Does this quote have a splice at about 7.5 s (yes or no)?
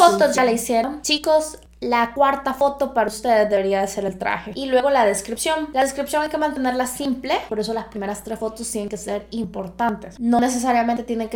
yes